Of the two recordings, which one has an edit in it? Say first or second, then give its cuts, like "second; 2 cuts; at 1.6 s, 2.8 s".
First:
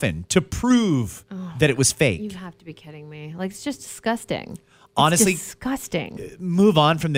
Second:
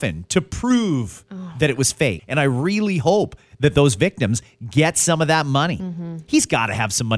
second; 1 cut; at 2.2 s